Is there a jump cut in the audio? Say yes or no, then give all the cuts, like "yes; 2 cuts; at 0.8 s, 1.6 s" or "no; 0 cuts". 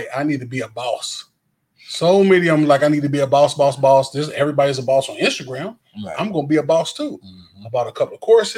no; 0 cuts